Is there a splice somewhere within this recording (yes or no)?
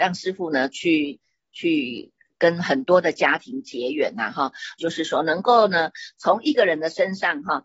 yes